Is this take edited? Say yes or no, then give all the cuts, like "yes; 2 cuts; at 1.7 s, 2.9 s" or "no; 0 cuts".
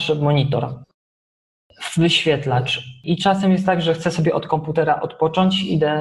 no; 0 cuts